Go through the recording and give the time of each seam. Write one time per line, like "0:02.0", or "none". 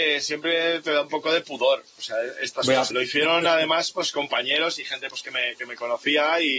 0:02.9